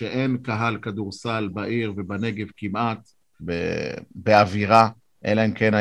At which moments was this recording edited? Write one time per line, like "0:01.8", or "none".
0:03.4